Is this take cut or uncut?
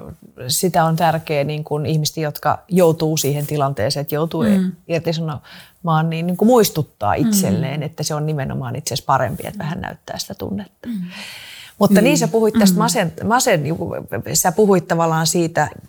uncut